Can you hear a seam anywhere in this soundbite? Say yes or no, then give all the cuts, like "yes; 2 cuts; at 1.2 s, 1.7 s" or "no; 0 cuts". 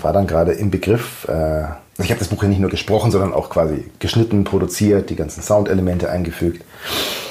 yes; 1 cut; at 1.9 s